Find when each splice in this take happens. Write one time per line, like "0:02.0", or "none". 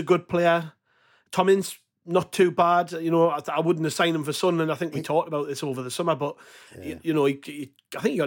none